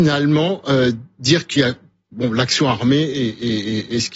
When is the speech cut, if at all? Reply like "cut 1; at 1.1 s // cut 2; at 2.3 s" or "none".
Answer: none